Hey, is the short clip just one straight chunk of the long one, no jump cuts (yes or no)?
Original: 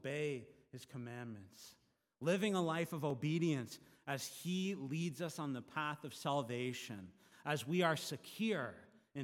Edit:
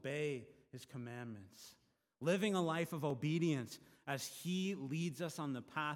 yes